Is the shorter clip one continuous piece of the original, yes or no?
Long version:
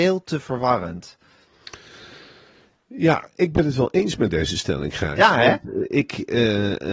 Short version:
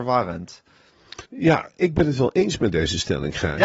no